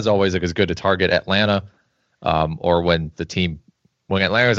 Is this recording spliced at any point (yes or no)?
no